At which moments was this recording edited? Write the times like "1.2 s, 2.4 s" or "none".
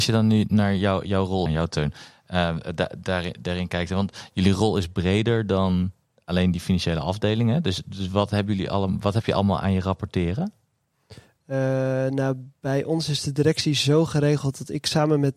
1.5 s